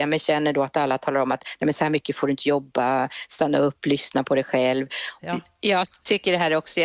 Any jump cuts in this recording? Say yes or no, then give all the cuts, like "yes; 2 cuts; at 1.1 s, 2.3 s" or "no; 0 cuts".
yes; 1 cut; at 5.2 s